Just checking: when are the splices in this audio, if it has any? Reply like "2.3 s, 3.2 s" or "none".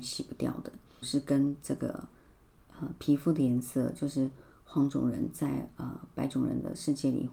1.0 s